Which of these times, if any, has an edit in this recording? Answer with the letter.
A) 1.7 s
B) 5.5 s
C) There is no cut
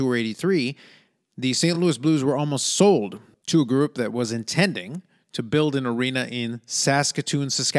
C